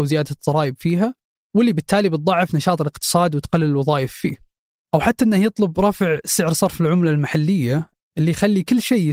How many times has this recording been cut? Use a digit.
0